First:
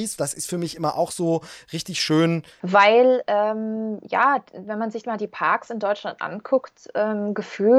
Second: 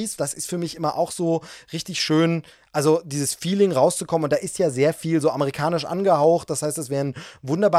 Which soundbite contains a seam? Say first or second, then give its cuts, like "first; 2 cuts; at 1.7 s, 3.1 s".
first; 1 cut; at 2.6 s